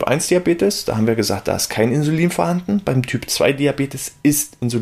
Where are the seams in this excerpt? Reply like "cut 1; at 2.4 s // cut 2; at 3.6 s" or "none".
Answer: none